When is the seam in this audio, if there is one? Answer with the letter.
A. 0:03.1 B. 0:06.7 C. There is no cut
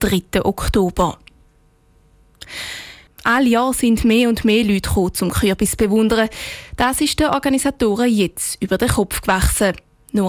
A